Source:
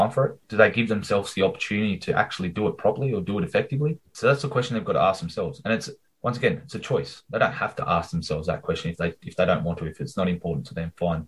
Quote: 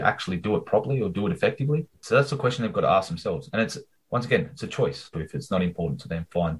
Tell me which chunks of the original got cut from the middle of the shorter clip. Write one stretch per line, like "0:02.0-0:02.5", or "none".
0:07.2-0:09.8